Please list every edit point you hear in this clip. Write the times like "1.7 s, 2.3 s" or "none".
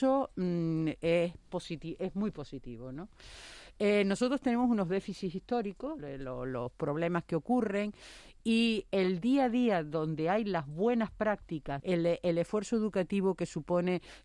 6.0 s, 11.8 s